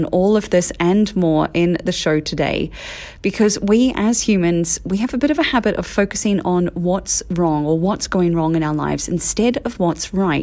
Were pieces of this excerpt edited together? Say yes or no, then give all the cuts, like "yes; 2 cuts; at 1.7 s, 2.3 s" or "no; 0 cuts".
no; 0 cuts